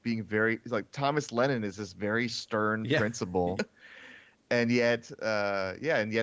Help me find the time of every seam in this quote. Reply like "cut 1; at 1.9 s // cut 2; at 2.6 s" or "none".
cut 1; at 3.6 s